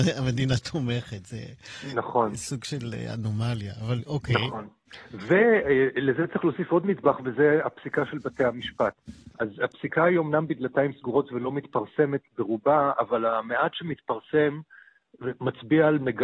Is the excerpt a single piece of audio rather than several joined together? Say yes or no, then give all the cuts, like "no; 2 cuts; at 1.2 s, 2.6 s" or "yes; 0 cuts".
yes; 0 cuts